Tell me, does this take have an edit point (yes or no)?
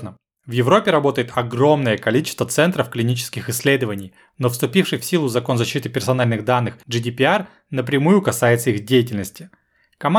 no